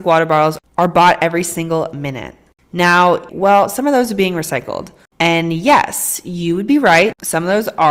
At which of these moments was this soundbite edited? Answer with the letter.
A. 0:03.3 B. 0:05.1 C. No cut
A